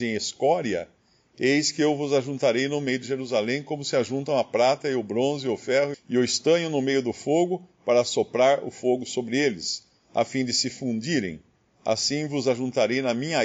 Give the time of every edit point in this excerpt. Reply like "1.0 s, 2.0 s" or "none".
5.9 s